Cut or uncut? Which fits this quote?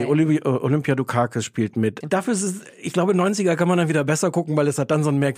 cut